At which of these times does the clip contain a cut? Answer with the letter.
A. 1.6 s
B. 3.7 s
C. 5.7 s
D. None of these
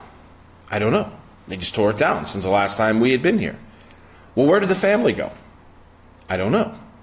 D